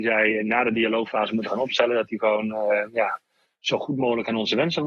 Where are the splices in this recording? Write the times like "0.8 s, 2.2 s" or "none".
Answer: none